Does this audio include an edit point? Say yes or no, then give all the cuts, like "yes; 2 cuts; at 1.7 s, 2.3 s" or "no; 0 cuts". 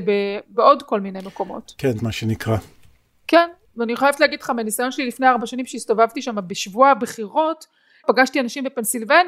yes; 2 cuts; at 2.0 s, 8.0 s